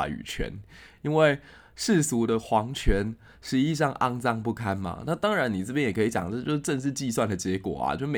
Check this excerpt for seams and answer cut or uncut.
uncut